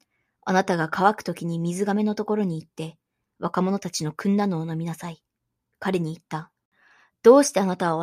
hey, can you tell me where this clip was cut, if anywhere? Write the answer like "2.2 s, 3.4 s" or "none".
5.7 s